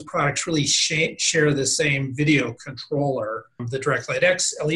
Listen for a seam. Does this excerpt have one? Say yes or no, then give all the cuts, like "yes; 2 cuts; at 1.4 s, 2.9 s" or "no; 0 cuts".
yes; 1 cut; at 3.6 s